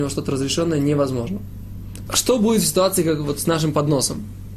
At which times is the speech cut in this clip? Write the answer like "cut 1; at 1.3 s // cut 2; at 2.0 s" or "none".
cut 1; at 2.1 s